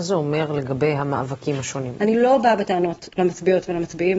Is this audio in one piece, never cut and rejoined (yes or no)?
no